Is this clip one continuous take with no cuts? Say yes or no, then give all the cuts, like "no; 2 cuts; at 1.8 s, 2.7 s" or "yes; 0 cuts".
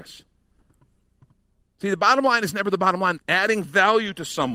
no; 2 cuts; at 1.7 s, 3.2 s